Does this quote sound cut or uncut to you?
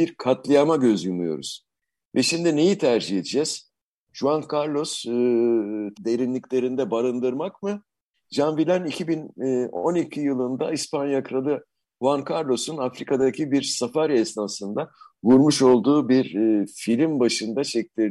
cut